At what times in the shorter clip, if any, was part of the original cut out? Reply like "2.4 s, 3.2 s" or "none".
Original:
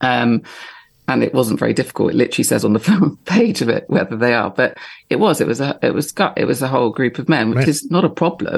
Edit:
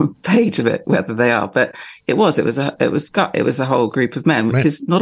none